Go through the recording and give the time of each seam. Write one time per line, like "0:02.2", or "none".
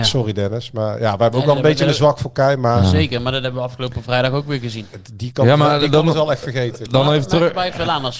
none